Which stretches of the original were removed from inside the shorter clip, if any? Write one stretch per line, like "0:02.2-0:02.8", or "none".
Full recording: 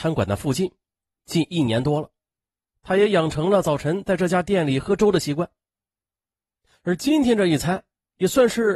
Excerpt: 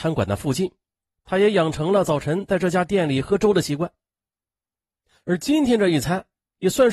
0:01.1-0:02.7

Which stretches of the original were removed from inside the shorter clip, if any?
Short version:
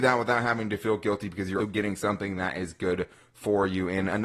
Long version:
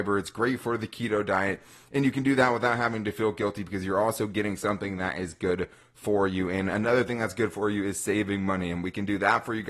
0:03.9-0:04.2

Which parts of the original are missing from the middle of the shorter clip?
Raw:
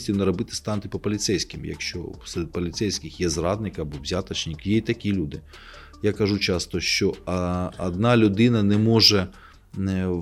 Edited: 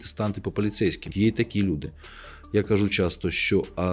0:01.6-0:04.6

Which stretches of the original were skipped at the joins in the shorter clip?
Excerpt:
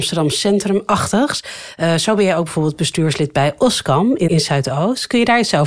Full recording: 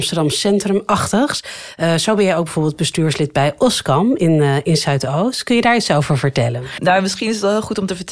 0:04.3-0:04.6

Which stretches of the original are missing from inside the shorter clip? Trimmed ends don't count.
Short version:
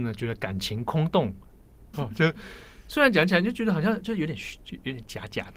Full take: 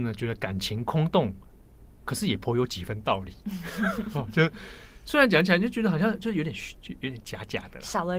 0:01.9-0:04.1

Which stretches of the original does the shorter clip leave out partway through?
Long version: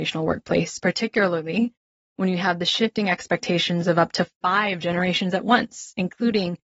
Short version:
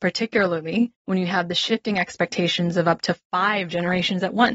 0:01.8-0:02.1

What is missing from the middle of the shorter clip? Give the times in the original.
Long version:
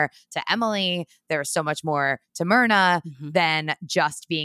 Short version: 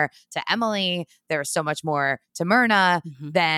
none

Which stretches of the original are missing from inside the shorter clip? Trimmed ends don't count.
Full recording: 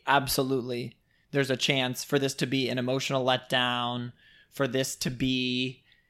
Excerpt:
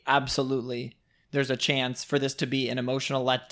none

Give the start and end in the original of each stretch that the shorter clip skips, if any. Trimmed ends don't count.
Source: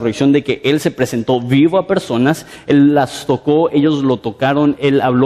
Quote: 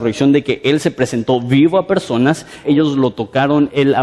0:02.6-0:03.7

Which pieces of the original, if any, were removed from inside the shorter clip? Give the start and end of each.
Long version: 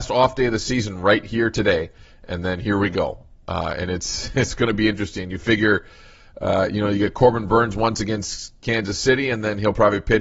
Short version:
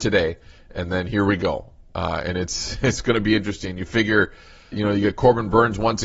0:06.2-0:06.7

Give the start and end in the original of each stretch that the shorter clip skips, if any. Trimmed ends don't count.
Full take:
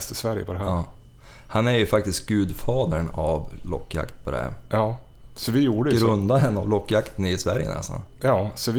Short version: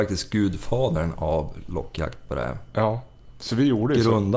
none

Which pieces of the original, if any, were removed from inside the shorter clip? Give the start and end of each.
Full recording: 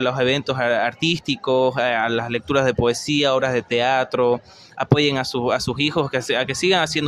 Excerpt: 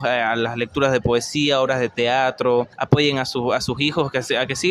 0:04.5-0:04.7

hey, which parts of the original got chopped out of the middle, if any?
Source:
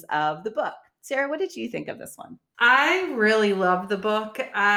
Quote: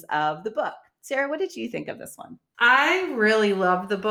none

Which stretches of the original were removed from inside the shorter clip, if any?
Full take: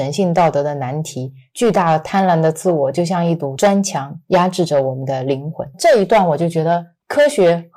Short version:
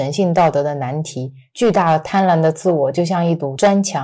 none

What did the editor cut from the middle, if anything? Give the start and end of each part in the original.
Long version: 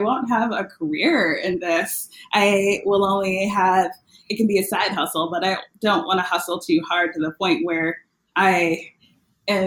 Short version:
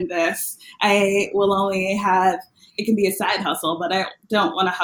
none

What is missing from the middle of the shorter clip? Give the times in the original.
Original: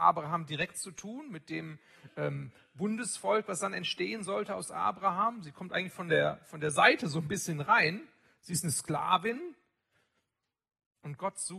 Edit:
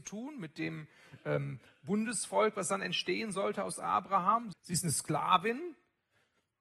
0:05.4-0:08.3

